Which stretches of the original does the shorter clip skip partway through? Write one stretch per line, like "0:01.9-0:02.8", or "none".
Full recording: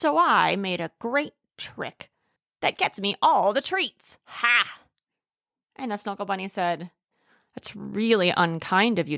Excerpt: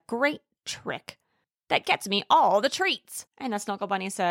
0:04.2-0:05.6